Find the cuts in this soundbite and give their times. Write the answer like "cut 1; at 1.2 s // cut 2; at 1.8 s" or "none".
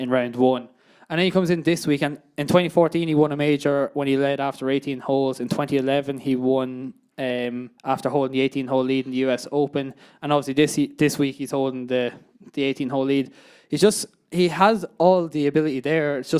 cut 1; at 7.8 s